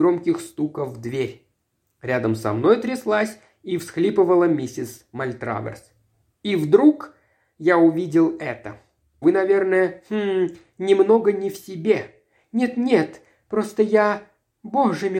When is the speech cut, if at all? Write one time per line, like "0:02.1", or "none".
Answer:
0:09.2